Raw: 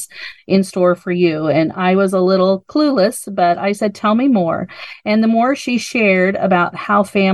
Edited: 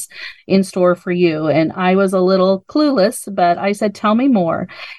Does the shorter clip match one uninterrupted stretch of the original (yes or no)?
yes